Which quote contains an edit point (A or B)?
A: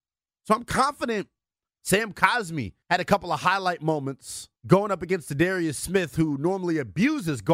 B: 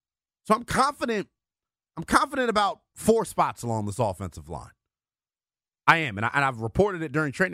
A